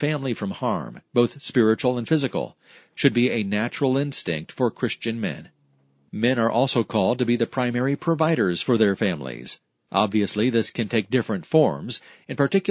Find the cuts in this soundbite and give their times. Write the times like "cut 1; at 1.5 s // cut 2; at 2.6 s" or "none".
none

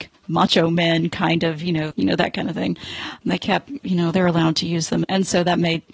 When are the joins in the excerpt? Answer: cut 1; at 1.9 s // cut 2; at 3.2 s // cut 3; at 5.0 s

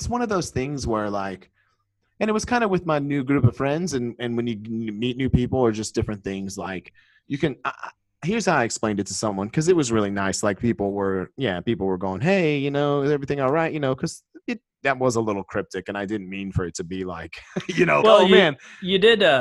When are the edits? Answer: cut 1; at 18.0 s

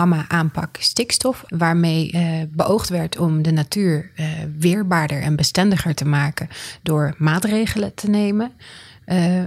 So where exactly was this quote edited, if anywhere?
cut 1; at 1.5 s

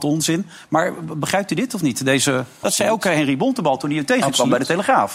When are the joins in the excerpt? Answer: cut 1; at 2.6 s

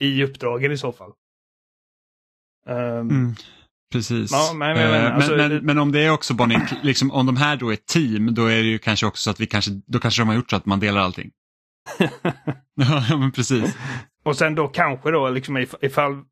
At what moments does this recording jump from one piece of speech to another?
cut 1; at 11.9 s // cut 2; at 14.1 s

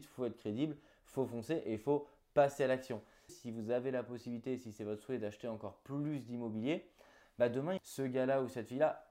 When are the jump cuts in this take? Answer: cut 1; at 3.3 s // cut 2; at 7.8 s

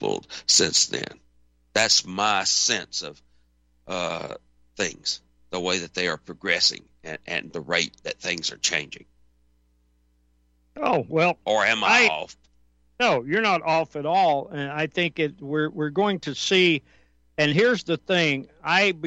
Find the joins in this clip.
none

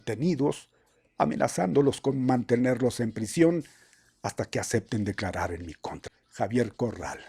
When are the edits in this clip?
cut 1; at 6.1 s

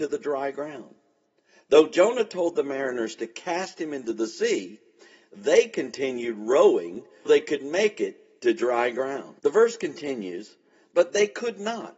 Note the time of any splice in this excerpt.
cut 1; at 7.3 s // cut 2; at 9.4 s

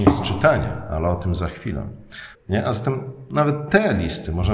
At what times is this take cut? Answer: cut 1; at 2.3 s

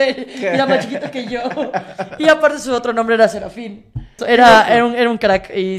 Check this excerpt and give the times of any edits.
cut 1; at 4.2 s

